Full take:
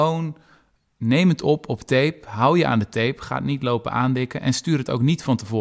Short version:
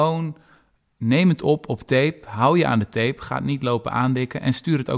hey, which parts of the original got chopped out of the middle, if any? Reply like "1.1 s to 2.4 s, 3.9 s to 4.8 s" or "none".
none